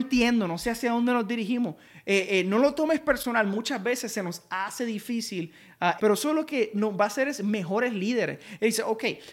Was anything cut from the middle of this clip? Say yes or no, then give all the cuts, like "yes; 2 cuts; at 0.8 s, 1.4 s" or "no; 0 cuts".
yes; 1 cut; at 6.0 s